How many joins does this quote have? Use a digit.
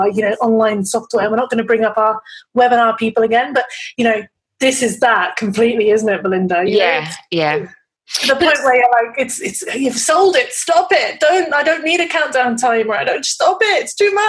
0